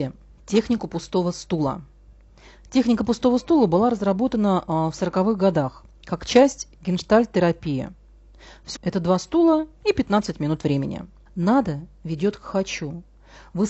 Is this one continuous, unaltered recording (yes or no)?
no